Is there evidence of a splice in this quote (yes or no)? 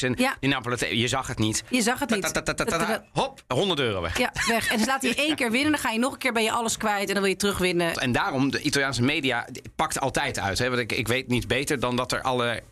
yes